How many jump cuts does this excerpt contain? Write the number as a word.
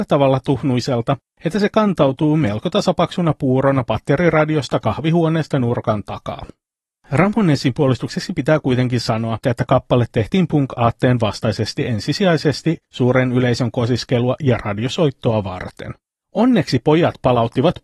one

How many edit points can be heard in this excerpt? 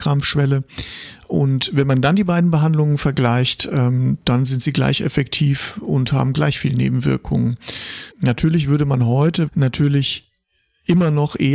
two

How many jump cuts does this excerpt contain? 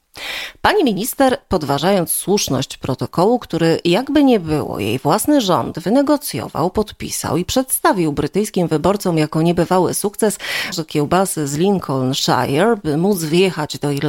one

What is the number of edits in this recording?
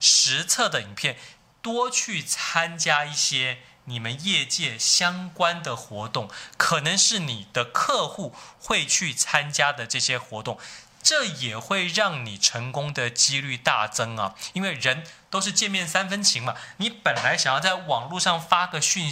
two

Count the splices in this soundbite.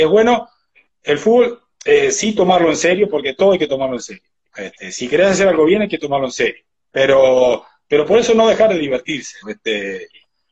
one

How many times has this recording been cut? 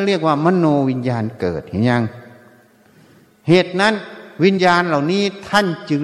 one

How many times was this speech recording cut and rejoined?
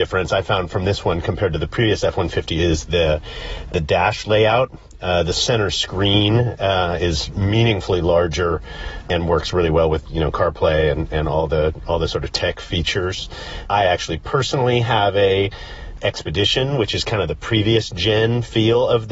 zero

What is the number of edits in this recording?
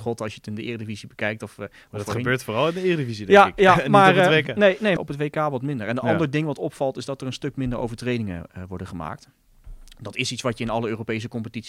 one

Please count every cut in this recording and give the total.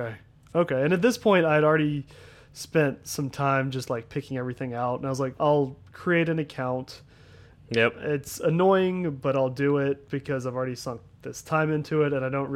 one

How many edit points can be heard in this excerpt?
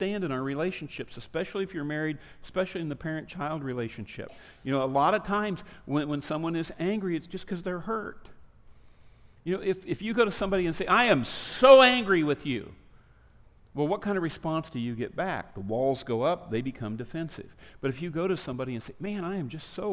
zero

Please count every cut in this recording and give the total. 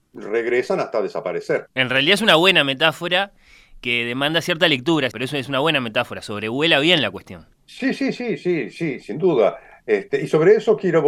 two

